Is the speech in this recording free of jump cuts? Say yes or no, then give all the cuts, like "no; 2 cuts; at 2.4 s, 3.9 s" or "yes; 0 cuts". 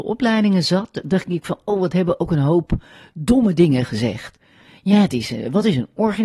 yes; 0 cuts